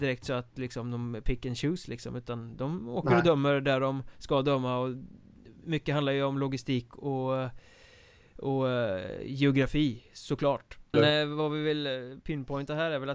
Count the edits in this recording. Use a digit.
1